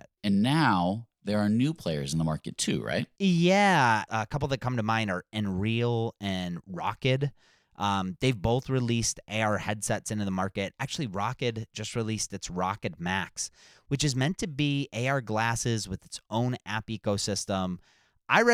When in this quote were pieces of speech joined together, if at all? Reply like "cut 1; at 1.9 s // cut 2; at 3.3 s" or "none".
cut 1; at 4.1 s